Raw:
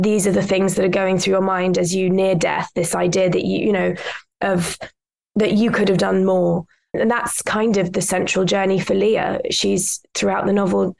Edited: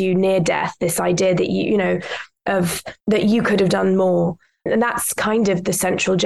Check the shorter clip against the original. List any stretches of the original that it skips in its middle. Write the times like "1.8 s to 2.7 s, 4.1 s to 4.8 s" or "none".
4.9 s to 5.3 s